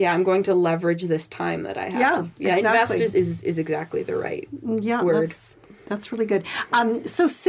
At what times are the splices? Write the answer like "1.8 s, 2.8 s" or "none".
none

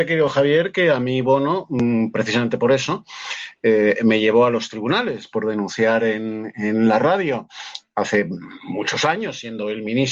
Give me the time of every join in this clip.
none

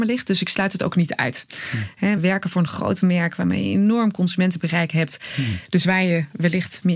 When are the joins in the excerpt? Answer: 2.2 s

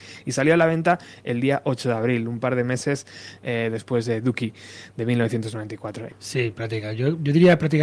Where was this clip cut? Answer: 6.1 s

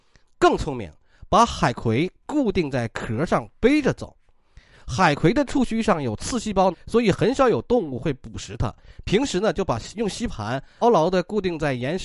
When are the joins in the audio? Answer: 6.7 s, 10.8 s

